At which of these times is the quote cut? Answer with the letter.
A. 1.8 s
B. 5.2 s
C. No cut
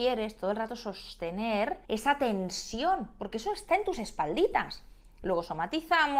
A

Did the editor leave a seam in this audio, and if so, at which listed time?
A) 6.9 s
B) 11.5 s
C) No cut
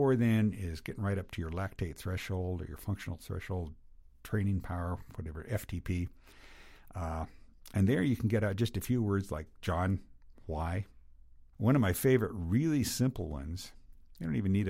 B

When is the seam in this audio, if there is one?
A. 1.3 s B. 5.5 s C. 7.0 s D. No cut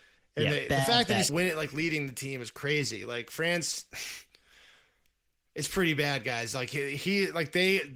A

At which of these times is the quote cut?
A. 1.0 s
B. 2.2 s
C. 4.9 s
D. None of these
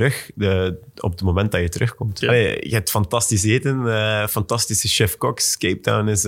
B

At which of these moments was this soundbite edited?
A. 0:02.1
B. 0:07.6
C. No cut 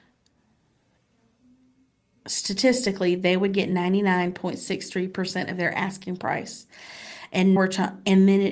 B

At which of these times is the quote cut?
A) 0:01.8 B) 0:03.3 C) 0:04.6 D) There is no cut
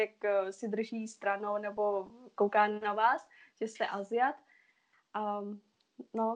D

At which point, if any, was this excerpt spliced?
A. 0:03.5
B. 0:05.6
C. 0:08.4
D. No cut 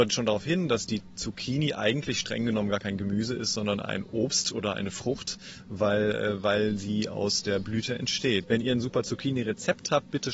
C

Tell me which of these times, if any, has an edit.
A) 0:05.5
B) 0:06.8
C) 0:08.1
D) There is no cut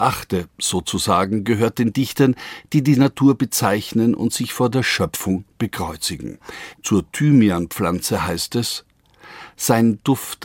B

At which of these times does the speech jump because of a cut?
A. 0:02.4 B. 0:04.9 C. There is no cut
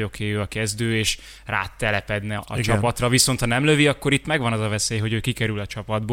A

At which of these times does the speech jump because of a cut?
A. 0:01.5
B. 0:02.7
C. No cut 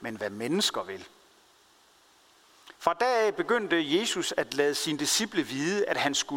B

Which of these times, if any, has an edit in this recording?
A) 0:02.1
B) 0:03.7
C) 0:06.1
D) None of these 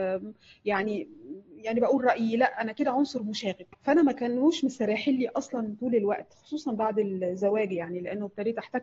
B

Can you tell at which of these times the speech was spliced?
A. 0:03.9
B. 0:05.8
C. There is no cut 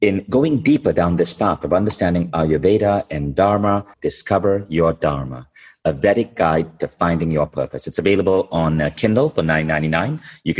A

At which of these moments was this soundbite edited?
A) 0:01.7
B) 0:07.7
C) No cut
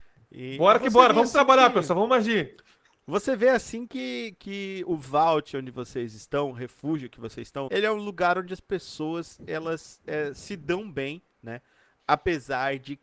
B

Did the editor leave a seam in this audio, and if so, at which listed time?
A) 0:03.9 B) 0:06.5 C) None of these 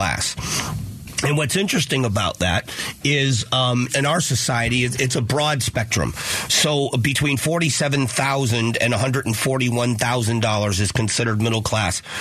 A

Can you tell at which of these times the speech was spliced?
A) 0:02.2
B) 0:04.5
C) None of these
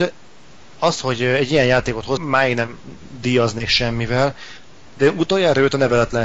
A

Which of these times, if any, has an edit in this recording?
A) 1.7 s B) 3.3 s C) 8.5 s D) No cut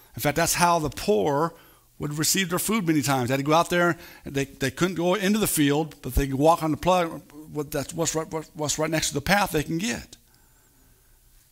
D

